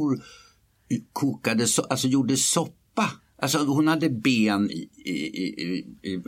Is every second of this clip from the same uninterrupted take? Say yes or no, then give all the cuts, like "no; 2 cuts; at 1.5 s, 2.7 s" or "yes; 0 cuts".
yes; 0 cuts